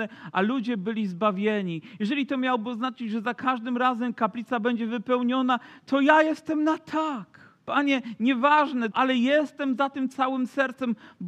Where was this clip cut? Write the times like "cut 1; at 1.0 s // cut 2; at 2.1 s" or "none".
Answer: cut 1; at 7.6 s // cut 2; at 8.9 s